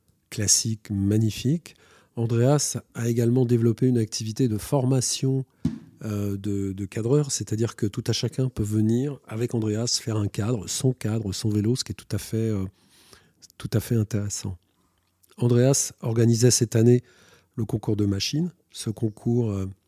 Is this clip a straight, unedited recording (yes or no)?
yes